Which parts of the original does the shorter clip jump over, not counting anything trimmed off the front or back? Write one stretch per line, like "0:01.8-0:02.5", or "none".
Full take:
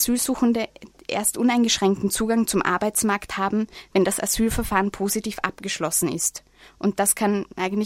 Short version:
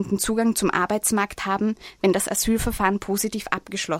none